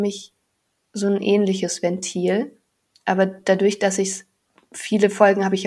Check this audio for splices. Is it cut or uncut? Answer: uncut